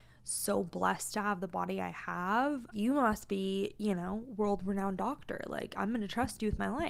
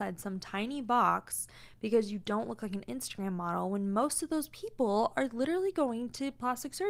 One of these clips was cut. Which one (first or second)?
first